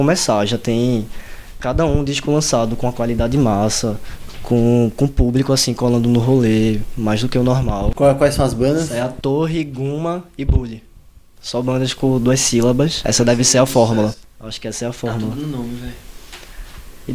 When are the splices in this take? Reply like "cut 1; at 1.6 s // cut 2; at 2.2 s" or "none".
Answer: none